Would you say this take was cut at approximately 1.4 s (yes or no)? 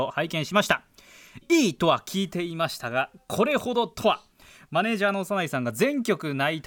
yes